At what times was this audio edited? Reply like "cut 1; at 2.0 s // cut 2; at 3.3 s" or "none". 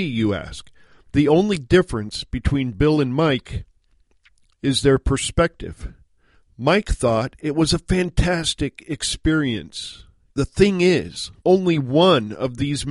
cut 1; at 10.3 s // cut 2; at 11.4 s